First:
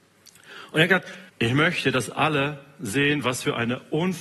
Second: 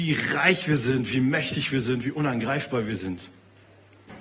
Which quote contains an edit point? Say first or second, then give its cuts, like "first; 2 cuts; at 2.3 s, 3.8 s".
first; 1 cut; at 1.3 s